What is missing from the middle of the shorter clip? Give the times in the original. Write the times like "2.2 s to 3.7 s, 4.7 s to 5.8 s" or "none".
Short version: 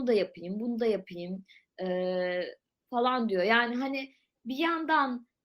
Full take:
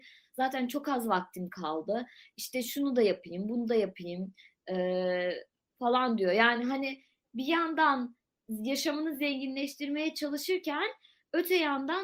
none